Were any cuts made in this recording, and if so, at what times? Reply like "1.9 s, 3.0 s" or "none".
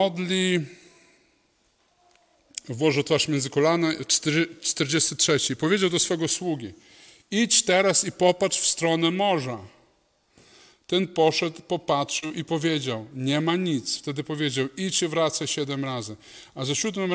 none